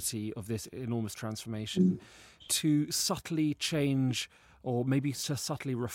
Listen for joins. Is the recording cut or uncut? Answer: uncut